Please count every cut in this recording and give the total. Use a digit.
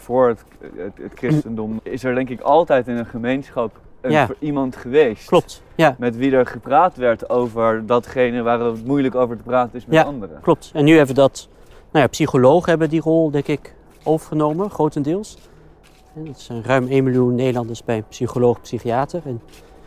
1